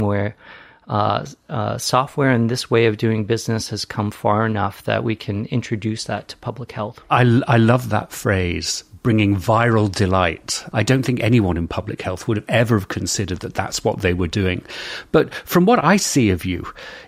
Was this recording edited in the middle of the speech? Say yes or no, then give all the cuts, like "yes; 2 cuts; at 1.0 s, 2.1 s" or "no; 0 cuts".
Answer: no; 0 cuts